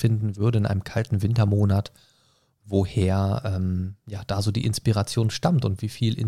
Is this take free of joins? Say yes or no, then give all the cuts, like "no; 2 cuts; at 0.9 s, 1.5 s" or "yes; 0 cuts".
yes; 0 cuts